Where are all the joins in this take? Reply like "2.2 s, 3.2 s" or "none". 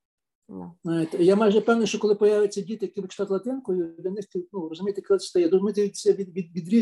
none